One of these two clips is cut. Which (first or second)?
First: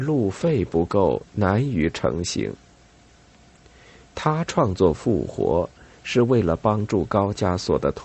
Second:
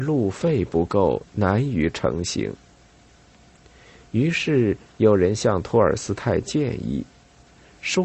first